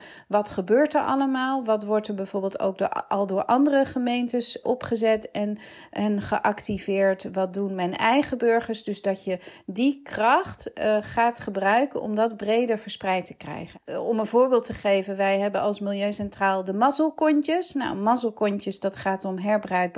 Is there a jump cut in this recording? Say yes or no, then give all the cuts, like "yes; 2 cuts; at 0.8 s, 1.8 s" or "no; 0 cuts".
yes; 1 cut; at 4.6 s